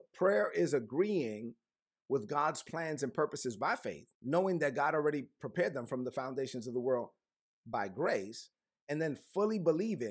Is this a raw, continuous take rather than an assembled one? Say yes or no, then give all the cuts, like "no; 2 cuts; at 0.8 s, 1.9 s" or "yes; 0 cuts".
no; 1 cut; at 4.1 s